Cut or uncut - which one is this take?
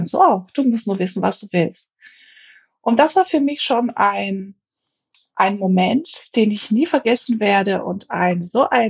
uncut